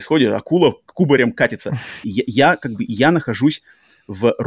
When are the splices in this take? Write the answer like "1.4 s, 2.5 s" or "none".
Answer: 2.0 s